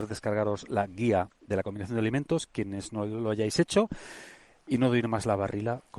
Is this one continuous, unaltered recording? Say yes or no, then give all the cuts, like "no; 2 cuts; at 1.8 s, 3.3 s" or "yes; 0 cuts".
yes; 0 cuts